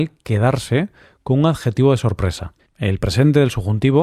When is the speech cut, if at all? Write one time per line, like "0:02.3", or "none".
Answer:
0:02.7